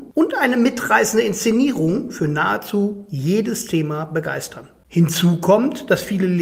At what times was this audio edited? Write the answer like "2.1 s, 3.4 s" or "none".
none